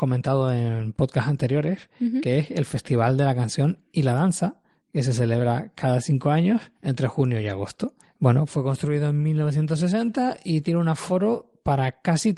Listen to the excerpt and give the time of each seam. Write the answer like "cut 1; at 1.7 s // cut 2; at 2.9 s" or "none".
cut 1; at 8.0 s